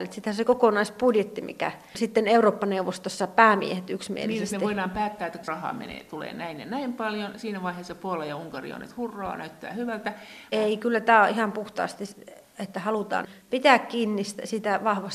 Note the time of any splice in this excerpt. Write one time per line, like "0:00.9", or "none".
0:10.5